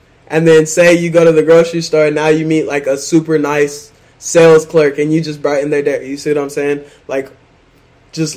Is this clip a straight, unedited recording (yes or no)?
yes